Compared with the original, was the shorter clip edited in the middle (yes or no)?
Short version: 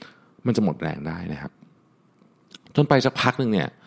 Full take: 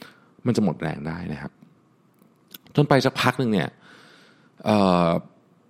no